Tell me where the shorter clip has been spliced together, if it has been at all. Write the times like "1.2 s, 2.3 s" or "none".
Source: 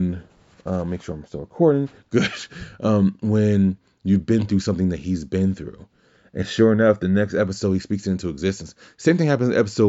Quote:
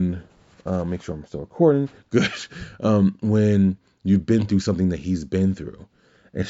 none